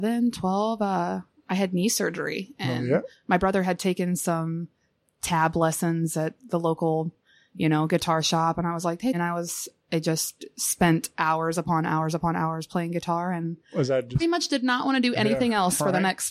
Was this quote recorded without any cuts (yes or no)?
no